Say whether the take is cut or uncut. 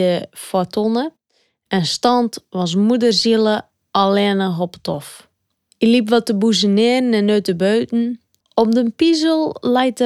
cut